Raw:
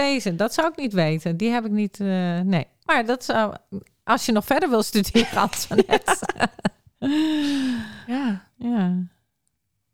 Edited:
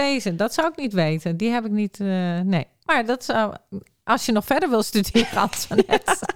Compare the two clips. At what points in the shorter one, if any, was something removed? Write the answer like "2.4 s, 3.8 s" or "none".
none